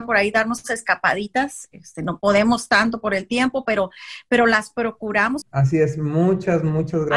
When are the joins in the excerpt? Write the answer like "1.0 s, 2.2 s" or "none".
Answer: 5.4 s